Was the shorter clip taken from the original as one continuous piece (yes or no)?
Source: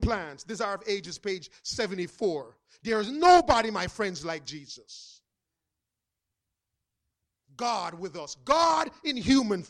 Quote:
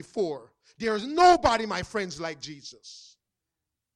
yes